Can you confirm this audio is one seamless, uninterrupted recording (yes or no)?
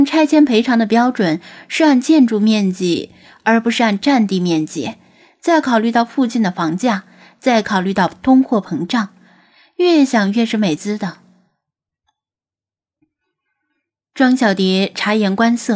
no